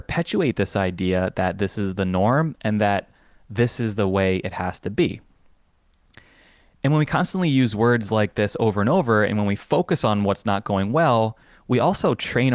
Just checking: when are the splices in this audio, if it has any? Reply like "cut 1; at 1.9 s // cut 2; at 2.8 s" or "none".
none